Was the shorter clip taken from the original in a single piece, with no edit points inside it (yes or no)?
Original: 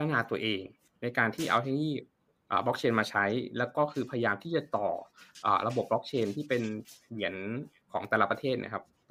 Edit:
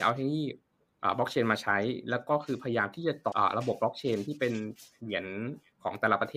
no